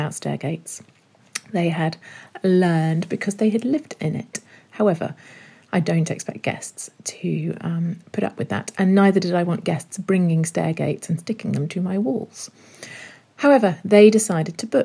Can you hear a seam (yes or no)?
no